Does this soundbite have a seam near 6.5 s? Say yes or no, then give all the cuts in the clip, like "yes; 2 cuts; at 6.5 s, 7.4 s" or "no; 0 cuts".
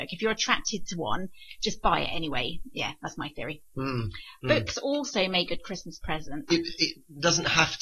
yes; 2 cuts; at 5.5 s, 6.5 s